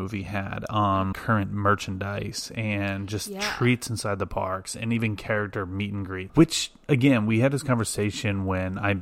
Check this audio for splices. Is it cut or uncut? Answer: cut